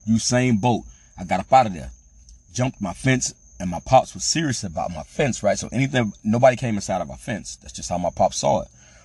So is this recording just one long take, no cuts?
yes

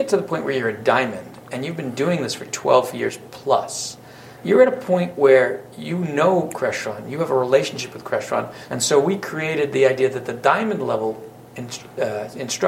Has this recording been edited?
yes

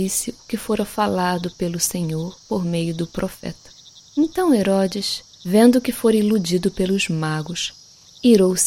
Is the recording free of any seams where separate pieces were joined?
no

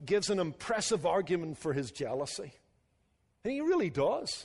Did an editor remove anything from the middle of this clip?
no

